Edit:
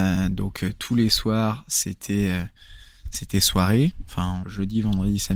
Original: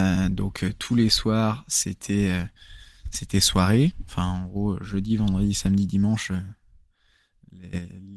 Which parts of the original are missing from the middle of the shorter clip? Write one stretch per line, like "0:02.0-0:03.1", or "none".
0:04.4-0:04.8